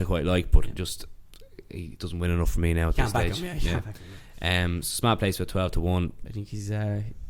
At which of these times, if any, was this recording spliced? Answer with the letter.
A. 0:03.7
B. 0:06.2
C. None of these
B